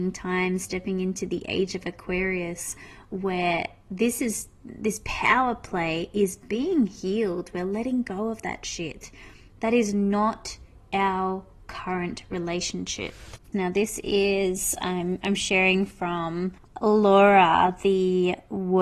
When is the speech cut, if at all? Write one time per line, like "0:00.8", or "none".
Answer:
0:13.5